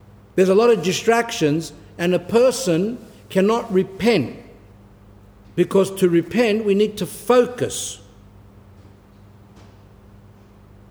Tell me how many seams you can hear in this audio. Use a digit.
0